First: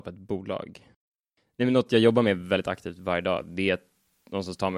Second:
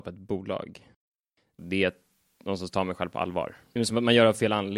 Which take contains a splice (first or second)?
second